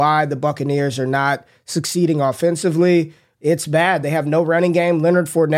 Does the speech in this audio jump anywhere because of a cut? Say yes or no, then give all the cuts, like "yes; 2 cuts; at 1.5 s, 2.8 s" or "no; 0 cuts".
no; 0 cuts